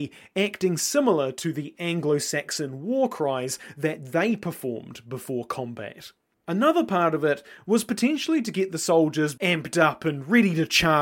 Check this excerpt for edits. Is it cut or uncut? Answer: cut